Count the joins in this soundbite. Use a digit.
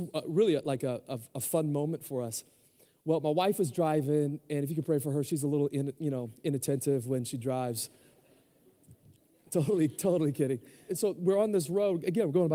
1